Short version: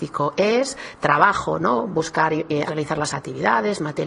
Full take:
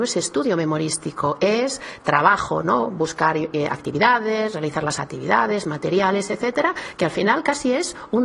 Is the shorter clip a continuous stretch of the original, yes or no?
no